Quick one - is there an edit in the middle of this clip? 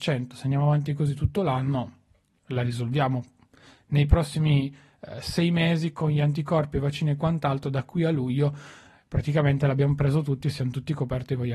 no; 0 cuts

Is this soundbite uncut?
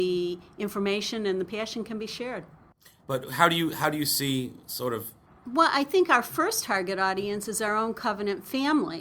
no; 1 cut; at 3.0 s

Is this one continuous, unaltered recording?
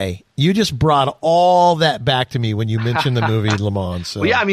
yes; 0 cuts

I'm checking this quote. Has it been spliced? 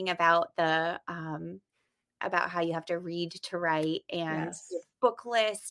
no; 0 cuts

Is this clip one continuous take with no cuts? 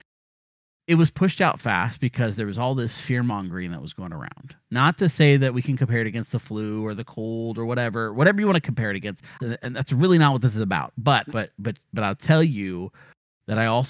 no; 2 cuts; at 9.4 s, 11.3 s

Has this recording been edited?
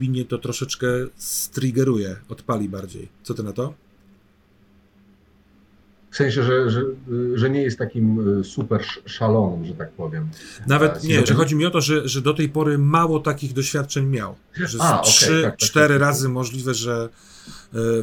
no; 0 cuts

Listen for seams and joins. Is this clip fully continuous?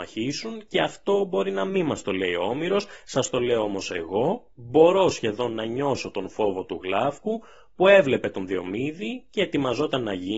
yes; 0 cuts

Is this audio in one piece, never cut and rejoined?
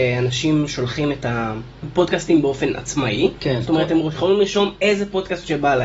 yes; 0 cuts

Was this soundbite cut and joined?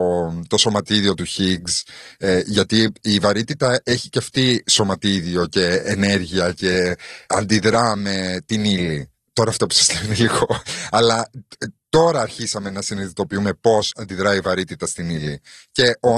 no; 0 cuts

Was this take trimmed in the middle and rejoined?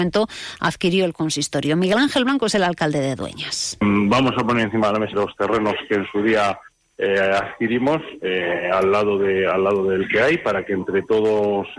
yes; 1 cut; at 5.1 s

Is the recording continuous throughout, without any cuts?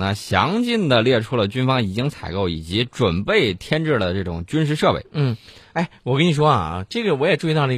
yes; 0 cuts

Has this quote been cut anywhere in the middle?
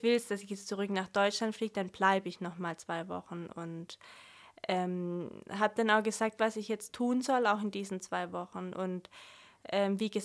yes; 1 cut; at 6.4 s

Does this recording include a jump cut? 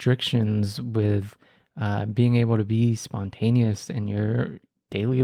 no; 0 cuts

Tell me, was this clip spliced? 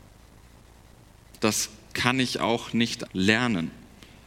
yes; 2 cuts; at 1.4 s, 3.1 s

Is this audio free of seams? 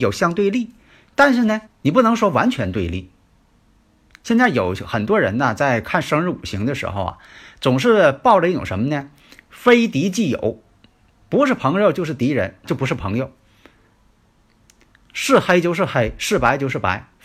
no; 2 cuts; at 1.7 s, 12.6 s

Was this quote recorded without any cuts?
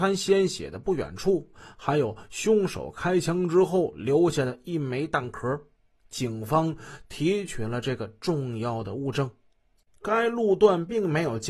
no; 1 cut; at 9.9 s

